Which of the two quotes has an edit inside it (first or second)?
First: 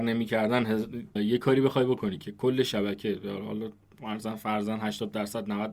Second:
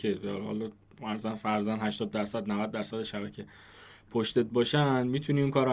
first